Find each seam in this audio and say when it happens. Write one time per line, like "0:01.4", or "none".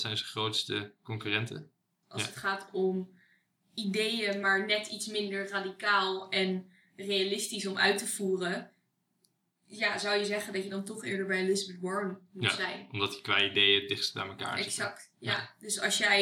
0:02.0